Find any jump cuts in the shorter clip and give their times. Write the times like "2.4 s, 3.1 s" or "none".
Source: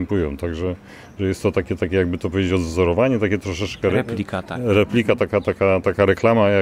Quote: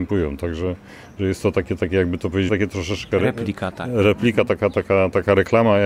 2.5 s